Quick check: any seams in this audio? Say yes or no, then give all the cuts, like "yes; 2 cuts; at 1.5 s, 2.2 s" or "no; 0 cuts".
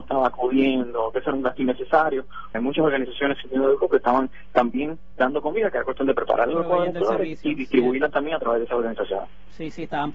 yes; 1 cut; at 2.5 s